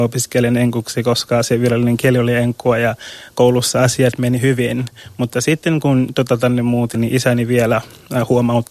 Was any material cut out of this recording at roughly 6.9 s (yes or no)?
yes